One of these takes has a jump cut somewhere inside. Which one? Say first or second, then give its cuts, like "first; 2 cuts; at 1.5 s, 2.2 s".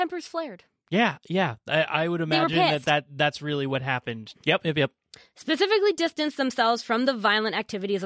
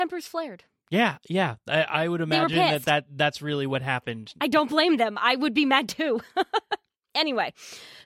first; 1 cut; at 4.3 s